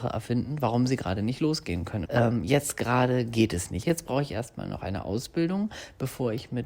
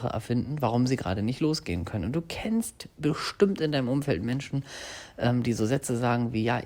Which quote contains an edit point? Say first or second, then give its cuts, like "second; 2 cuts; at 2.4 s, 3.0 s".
first; 2 cuts; at 2.0 s, 3.8 s